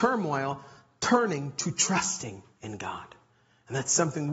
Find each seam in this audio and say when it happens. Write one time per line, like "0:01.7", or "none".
none